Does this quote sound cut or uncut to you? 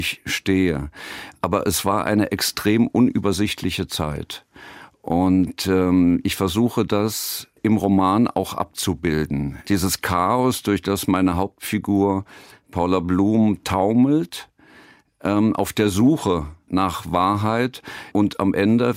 uncut